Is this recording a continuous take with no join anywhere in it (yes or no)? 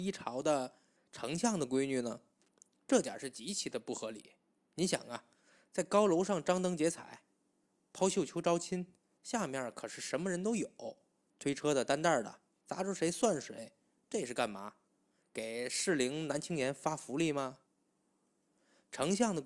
yes